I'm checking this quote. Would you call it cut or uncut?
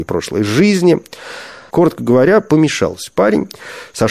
cut